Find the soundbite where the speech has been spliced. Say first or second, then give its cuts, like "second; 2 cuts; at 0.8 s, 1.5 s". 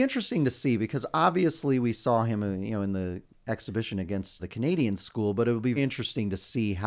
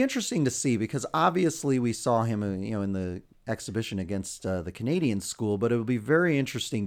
first; 2 cuts; at 4.4 s, 5.8 s